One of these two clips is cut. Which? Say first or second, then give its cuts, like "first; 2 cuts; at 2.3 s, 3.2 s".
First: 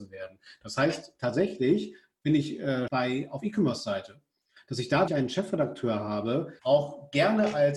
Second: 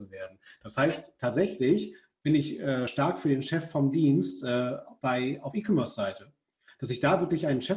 first; 3 cuts; at 2.9 s, 5.1 s, 6.6 s